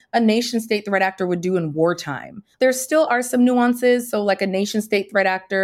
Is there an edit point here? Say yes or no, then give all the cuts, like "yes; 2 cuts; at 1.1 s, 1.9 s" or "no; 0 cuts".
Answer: yes; 1 cut; at 2.5 s